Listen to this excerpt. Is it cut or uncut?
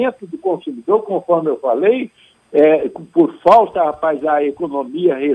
uncut